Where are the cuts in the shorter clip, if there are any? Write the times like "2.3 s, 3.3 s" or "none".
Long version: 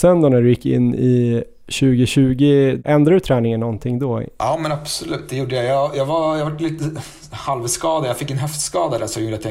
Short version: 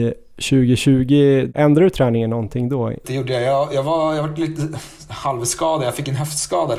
3.0 s